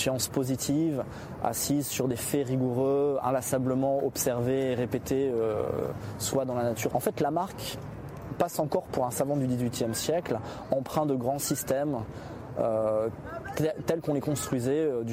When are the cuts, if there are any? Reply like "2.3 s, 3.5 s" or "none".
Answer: 6.9 s